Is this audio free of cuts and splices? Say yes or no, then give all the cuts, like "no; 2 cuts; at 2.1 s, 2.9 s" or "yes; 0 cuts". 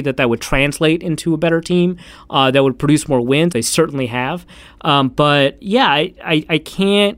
no; 2 cuts; at 3.5 s, 5.6 s